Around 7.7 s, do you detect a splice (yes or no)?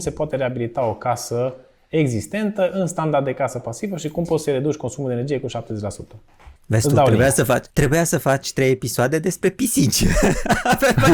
yes